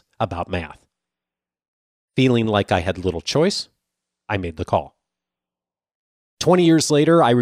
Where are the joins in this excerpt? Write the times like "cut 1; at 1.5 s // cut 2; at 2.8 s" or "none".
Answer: none

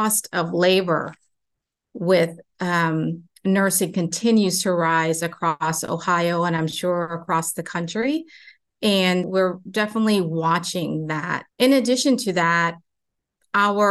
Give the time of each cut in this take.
cut 1; at 9.2 s // cut 2; at 11.5 s

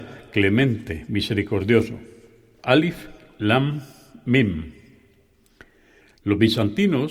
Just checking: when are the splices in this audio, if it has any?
none

